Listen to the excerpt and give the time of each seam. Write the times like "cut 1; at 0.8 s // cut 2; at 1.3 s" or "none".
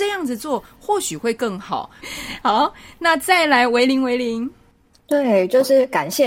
cut 1; at 2.0 s